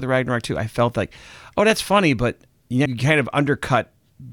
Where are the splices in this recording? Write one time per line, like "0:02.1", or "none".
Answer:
0:02.9